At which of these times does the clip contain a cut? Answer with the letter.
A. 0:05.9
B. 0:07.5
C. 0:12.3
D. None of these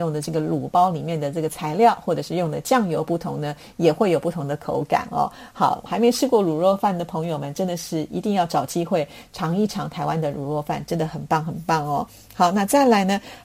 A